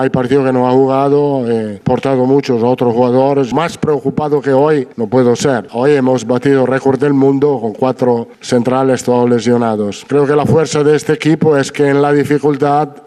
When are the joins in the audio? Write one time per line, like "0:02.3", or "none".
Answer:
none

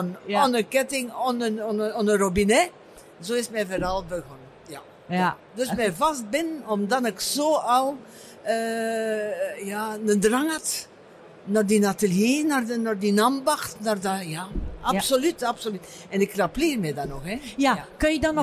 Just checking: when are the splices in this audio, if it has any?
none

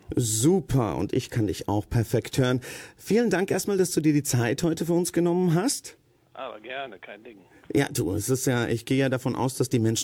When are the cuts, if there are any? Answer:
none

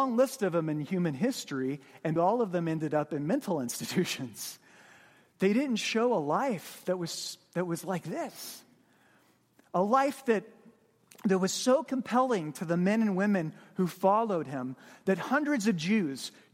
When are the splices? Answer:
0:02.2

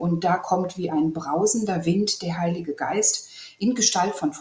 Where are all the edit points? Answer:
none

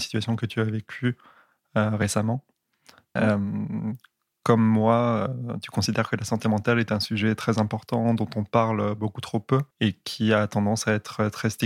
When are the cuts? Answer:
0:03.2
0:09.7

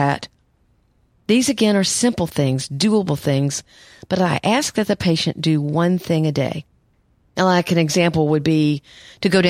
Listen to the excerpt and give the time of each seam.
none

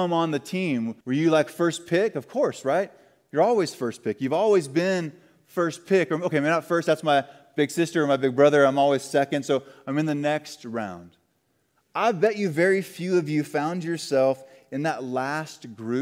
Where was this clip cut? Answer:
0:01.0

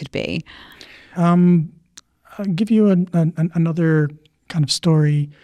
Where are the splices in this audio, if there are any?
0:01.1

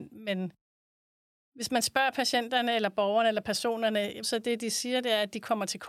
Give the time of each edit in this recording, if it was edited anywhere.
0:04.2

